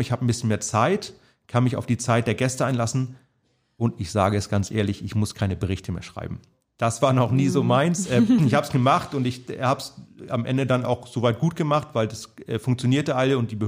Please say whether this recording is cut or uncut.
uncut